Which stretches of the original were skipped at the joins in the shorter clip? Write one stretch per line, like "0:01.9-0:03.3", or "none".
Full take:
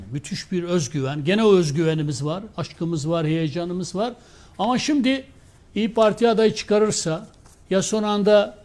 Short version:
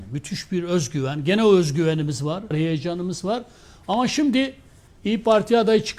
0:02.5-0:03.2